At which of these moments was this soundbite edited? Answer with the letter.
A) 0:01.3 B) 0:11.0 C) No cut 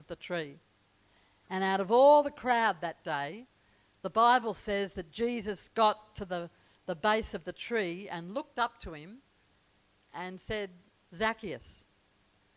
B